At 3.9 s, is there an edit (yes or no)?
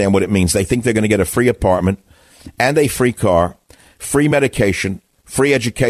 no